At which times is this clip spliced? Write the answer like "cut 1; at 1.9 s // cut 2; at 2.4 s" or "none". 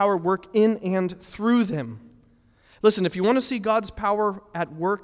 none